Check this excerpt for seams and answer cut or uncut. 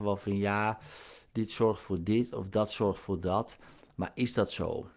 uncut